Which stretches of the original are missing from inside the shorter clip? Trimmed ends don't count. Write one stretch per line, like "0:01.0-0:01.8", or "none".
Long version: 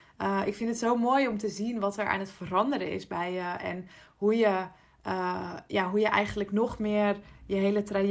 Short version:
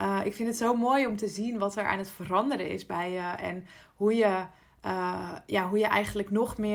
none

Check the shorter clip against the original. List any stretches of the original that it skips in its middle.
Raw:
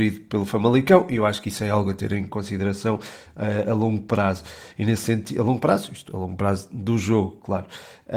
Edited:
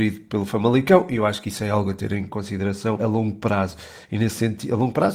0:03.0-0:03.6

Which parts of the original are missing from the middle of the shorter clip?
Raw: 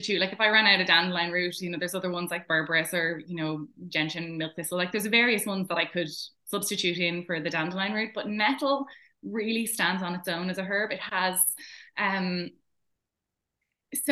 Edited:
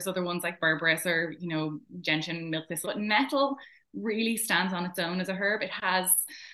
0:04.7-0:08.1

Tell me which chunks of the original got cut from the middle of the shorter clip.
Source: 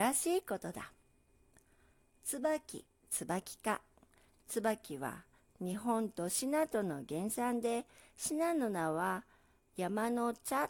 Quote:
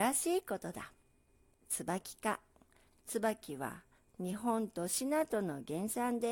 0:01.5-0:03.0

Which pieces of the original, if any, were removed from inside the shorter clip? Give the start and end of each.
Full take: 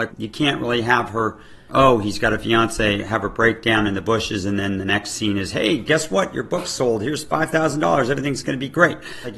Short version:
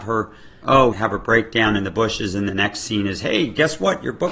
0:02.0-0:03.0
0:04.6-0:04.8

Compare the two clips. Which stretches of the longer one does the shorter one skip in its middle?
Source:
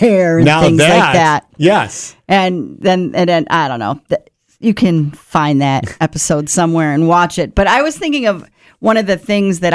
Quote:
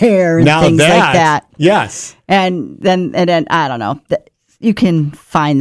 none

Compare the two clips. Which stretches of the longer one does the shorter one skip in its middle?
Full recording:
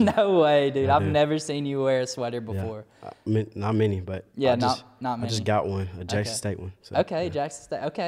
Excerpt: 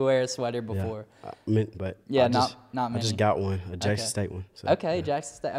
0:03.5-0:04.0

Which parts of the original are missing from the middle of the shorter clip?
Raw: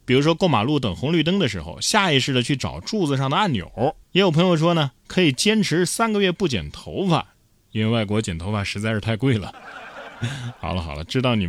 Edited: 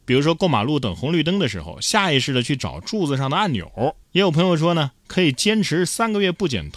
none

